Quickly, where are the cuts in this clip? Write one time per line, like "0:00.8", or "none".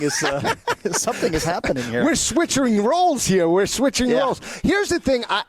none